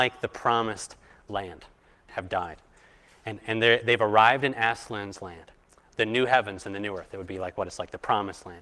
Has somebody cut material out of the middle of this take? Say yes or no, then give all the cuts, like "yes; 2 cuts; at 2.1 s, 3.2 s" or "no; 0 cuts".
yes; 2 cuts; at 2.1 s, 3.4 s